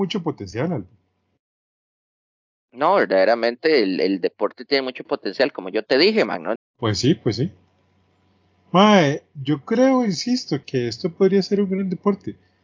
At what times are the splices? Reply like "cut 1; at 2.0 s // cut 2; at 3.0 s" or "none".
cut 1; at 6.6 s // cut 2; at 10.6 s